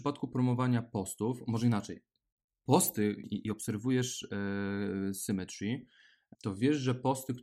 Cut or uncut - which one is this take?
cut